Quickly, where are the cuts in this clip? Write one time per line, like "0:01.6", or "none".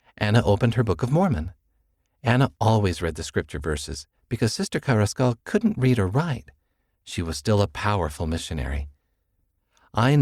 none